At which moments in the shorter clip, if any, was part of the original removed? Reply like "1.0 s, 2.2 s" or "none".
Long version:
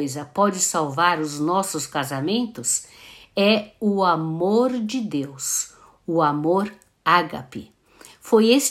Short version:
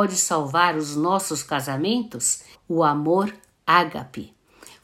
2.5 s